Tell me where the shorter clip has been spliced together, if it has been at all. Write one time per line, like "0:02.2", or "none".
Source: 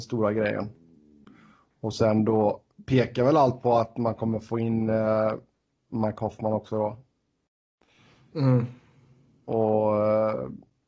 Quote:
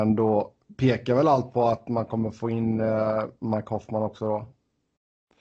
0:03.4